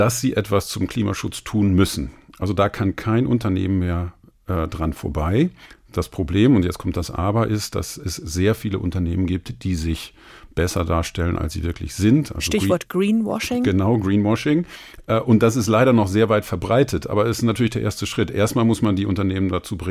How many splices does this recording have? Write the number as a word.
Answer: zero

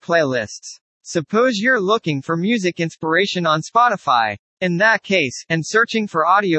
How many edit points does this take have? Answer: one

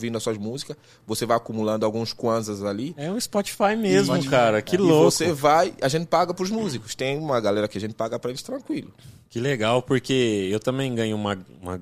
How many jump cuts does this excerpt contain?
zero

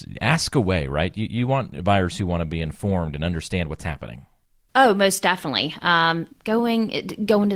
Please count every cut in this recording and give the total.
one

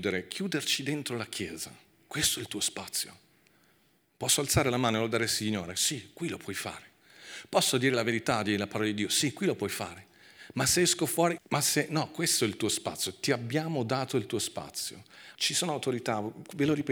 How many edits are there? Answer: two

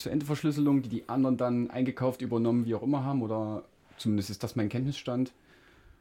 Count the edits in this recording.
zero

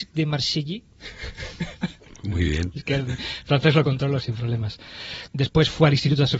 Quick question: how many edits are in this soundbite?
two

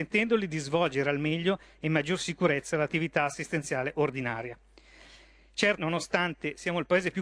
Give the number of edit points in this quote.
one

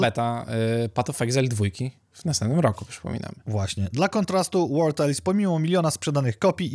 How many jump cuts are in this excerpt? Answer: zero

